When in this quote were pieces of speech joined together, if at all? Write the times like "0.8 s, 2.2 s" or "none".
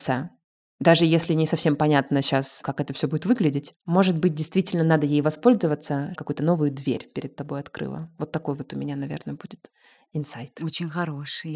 3.8 s, 6.1 s